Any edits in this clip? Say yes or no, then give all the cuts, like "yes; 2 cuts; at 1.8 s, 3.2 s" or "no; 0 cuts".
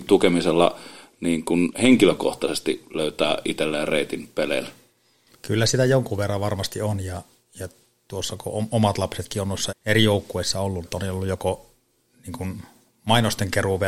yes; 2 cuts; at 9.7 s, 10.8 s